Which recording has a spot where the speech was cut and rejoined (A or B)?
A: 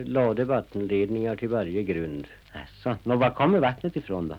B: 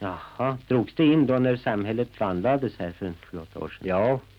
A